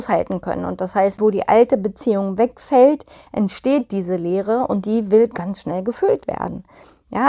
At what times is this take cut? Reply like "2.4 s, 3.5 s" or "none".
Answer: 1.2 s